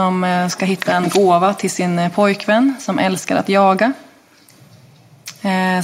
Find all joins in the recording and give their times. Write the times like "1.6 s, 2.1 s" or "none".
none